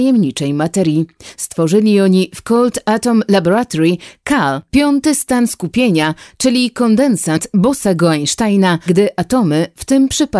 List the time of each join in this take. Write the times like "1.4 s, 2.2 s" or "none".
8.9 s